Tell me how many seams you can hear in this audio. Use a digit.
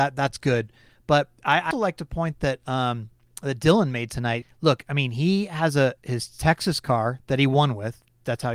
2